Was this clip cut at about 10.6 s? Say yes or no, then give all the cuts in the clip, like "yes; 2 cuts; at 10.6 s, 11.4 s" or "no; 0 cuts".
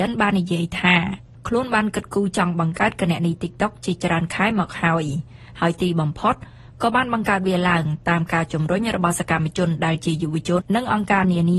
yes; 1 cut; at 10.6 s